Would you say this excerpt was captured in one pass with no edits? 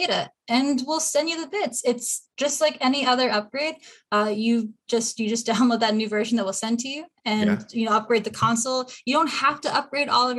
yes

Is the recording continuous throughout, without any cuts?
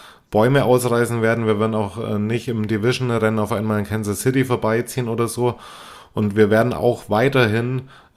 yes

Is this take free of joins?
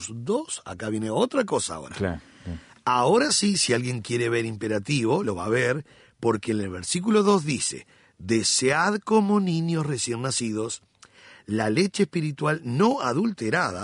yes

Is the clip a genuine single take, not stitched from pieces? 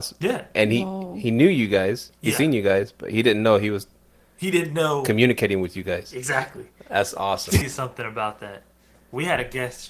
no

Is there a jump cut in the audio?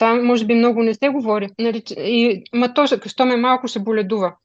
no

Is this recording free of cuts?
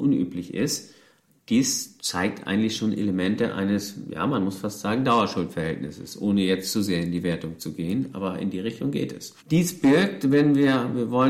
no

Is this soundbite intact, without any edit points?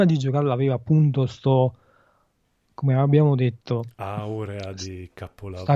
yes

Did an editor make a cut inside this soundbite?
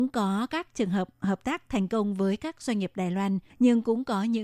yes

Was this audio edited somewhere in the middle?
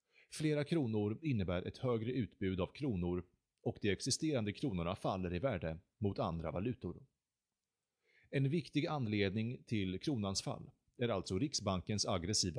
no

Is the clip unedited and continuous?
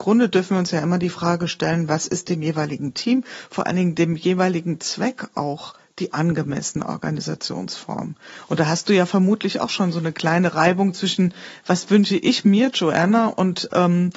yes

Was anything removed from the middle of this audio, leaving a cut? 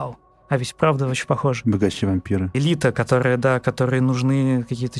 yes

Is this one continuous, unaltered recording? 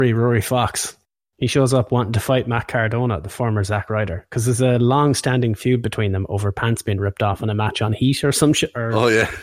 yes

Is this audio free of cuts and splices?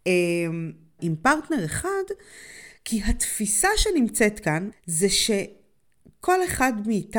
no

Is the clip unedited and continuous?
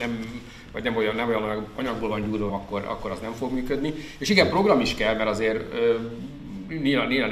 no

